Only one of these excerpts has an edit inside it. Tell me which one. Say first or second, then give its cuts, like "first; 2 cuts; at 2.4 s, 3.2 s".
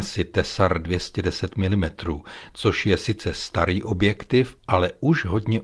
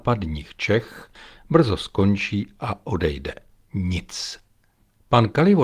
second; 1 cut; at 3.6 s